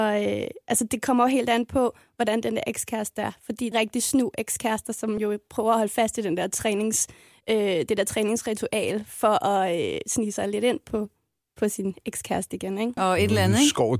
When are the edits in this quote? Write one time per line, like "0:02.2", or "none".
0:03.7
0:13.0